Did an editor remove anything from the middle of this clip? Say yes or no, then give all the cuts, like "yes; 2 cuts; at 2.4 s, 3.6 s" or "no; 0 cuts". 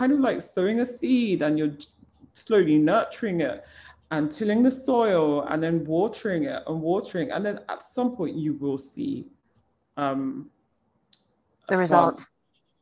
no; 0 cuts